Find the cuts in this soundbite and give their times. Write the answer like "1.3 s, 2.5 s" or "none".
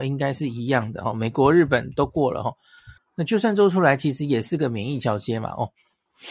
3.0 s